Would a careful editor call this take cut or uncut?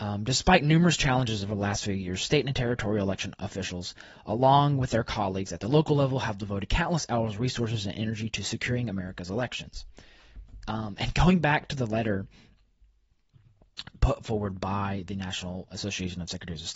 cut